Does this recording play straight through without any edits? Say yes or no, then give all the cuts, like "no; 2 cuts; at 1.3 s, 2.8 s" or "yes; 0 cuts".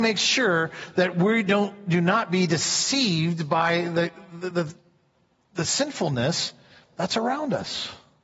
yes; 0 cuts